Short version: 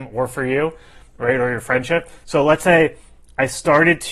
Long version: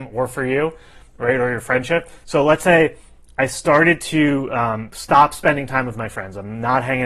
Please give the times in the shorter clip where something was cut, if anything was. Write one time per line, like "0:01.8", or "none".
none